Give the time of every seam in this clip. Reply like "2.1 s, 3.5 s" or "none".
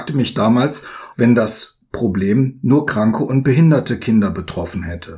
1.1 s